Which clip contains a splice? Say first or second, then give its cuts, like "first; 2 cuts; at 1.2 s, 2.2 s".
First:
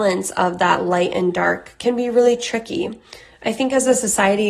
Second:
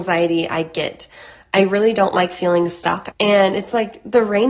second; 1 cut; at 3.1 s